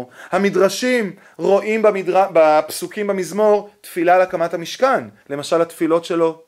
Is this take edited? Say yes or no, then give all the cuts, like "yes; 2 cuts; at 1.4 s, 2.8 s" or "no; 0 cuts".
yes; 1 cut; at 5.2 s